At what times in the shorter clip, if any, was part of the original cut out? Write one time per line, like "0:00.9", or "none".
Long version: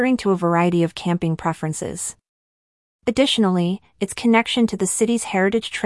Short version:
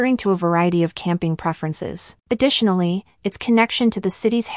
0:02.2

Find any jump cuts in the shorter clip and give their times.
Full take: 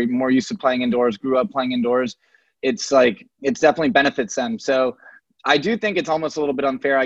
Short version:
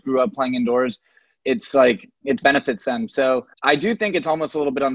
0:02.4
0:03.5

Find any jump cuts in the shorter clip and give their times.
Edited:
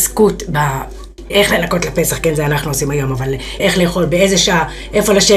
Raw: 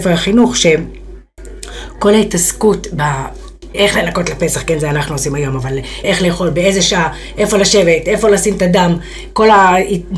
none

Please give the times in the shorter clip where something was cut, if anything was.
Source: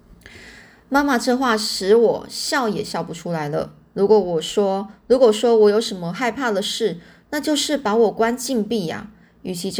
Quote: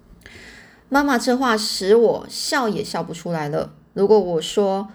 none

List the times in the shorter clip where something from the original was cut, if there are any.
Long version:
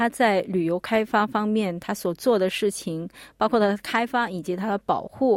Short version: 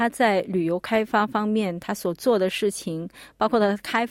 none

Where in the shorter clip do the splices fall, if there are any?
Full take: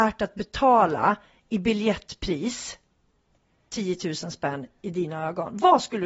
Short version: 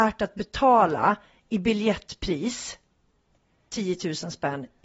none

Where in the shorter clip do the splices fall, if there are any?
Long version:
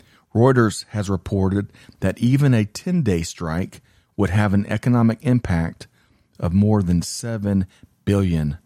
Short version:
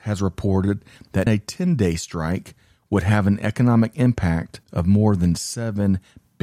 0:01.3
0:04.6

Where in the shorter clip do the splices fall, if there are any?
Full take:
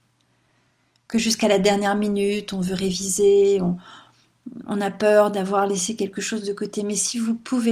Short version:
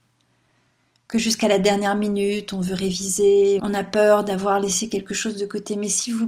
0:03.6

